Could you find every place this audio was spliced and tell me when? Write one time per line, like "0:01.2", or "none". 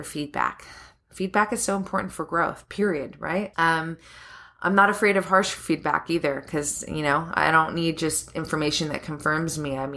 0:03.5